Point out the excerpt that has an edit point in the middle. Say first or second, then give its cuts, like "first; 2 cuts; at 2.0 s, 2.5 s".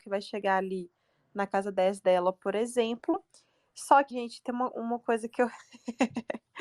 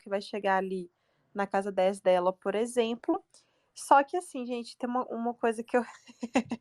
first; 1 cut; at 4.1 s